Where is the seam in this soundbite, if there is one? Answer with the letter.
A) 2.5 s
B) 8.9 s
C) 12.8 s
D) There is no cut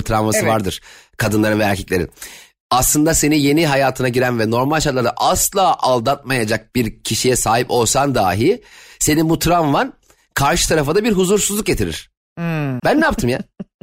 C